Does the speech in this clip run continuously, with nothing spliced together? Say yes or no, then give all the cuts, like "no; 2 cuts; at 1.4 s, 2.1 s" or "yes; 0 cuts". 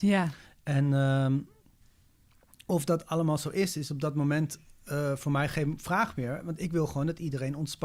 yes; 0 cuts